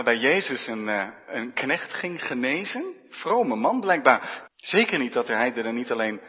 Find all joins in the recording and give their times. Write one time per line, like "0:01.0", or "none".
0:04.5

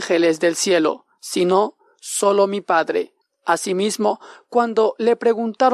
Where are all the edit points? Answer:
0:03.2

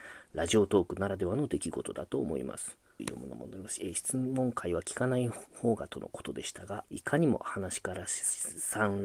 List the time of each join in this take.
0:03.0
0:06.8

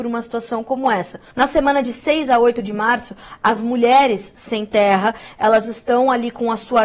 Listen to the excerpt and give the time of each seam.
0:01.3

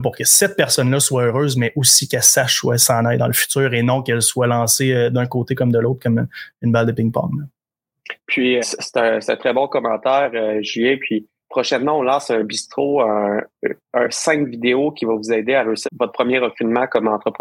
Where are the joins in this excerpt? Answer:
0:08.6
0:11.4
0:15.8

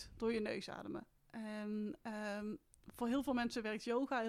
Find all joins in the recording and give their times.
none

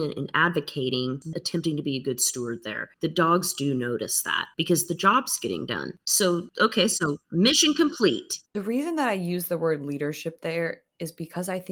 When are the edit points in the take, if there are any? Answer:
0:01.3

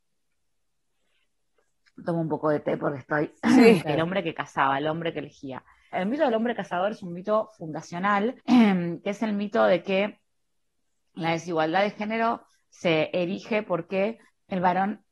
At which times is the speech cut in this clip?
0:03.8
0:05.9
0:08.4

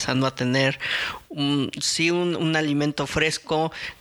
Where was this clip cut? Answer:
none

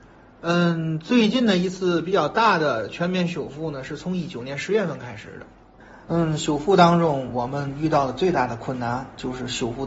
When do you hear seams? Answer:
0:06.1

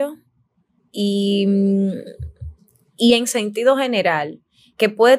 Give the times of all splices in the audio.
none

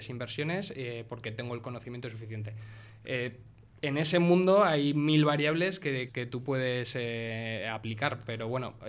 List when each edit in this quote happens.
0:06.1

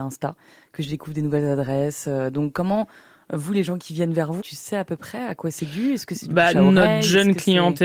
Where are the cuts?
0:04.4

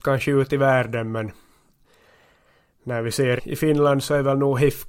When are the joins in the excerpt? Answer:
0:03.4

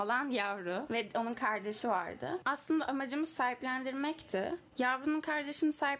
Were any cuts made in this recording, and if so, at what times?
none

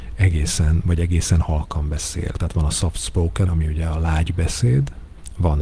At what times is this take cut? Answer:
0:02.3
0:03.5

